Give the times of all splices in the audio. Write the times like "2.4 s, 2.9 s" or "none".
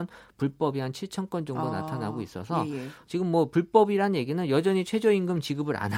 none